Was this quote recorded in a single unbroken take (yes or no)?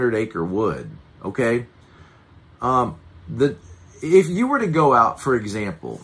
yes